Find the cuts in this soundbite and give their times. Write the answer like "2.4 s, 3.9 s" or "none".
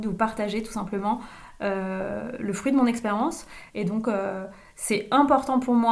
3.7 s